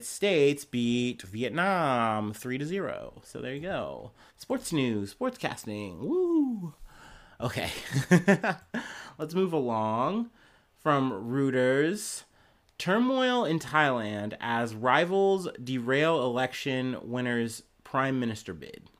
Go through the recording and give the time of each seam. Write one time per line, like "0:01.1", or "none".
none